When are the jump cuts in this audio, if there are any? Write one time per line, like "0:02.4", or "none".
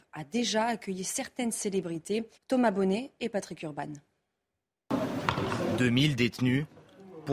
0:02.4

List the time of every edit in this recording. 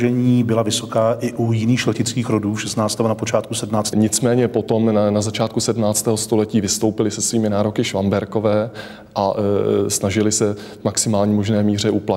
0:03.9

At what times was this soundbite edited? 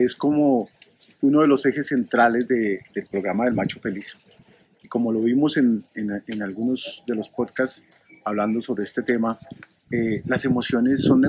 none

